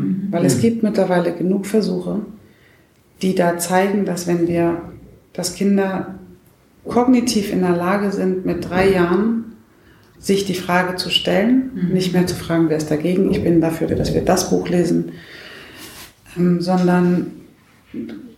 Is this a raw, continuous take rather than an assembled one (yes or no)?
no